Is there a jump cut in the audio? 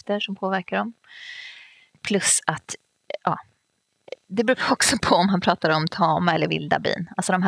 no; 0 cuts

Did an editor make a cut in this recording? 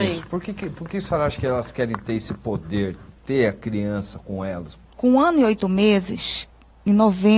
yes; 1 cut; at 4.9 s

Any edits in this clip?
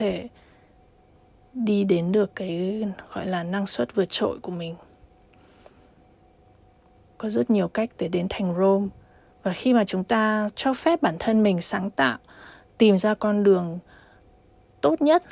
yes; 1 cut; at 7.1 s

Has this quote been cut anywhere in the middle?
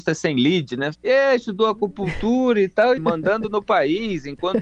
yes; 2 cuts; at 0.9 s, 3.0 s

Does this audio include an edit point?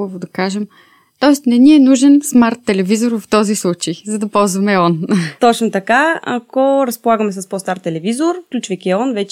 no; 0 cuts

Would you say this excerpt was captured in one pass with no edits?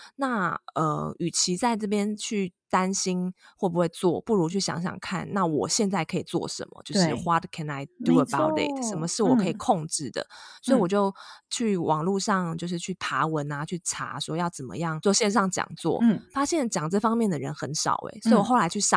yes; 0 cuts

